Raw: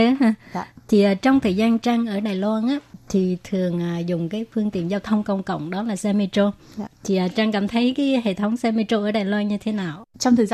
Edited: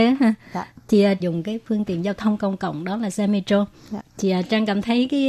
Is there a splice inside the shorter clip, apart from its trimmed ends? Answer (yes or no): yes